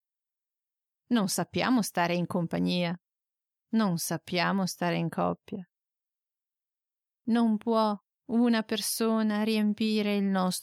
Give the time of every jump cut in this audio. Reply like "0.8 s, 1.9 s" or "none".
none